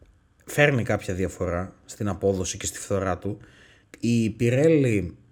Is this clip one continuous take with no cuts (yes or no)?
no